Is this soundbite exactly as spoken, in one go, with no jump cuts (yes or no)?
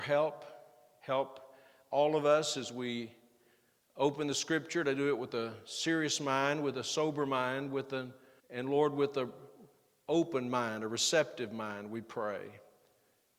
no